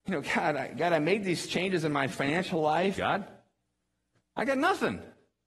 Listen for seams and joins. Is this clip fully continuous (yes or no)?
no